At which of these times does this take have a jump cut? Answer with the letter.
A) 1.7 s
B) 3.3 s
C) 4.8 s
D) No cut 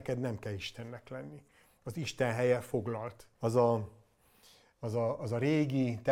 B